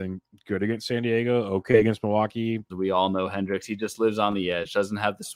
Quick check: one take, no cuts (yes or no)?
no